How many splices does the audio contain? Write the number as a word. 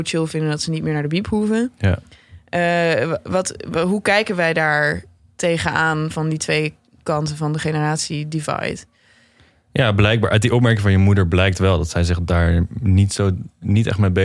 zero